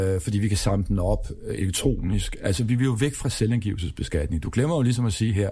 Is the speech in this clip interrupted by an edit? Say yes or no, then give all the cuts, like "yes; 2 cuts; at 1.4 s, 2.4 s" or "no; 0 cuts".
no; 0 cuts